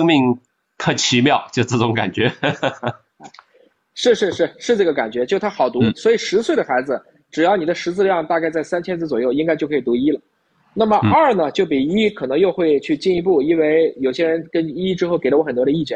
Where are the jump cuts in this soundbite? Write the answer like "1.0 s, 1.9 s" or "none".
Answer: none